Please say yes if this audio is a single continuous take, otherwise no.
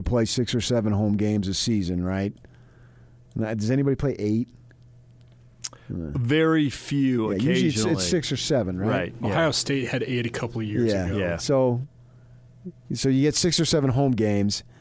yes